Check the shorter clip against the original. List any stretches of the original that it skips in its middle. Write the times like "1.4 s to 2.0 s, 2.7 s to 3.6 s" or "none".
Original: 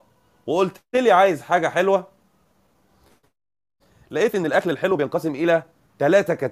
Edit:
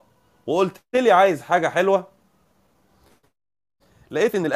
none